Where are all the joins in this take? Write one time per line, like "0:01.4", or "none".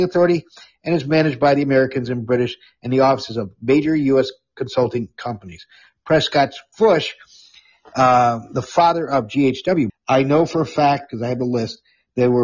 0:09.9